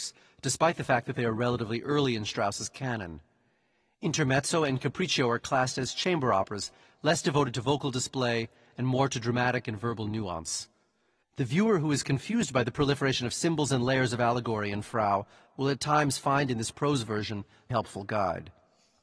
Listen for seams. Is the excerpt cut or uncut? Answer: cut